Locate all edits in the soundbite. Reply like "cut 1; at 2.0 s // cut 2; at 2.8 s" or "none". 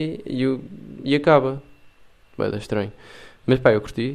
none